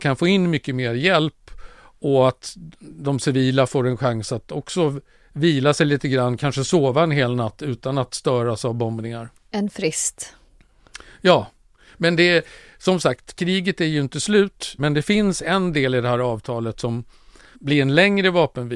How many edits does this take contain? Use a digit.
2